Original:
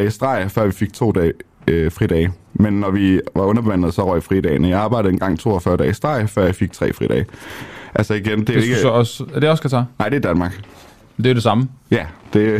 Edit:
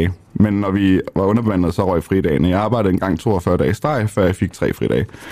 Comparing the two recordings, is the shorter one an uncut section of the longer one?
yes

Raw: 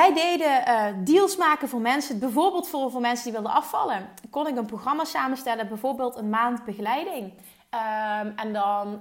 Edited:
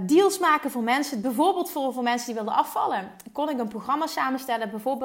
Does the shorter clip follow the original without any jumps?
yes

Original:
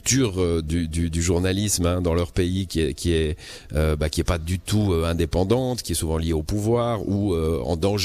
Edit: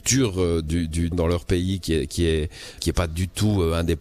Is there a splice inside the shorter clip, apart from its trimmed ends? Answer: yes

